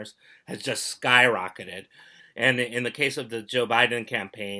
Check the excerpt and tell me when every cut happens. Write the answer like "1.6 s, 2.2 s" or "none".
2.2 s